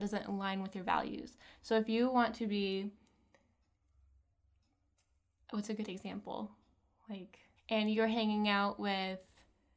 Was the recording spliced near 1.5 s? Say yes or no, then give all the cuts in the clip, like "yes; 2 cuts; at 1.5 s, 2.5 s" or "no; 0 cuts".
no; 1 cut; at 7.6 s